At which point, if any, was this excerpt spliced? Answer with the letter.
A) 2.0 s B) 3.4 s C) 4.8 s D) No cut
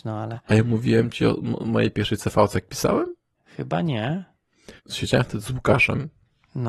C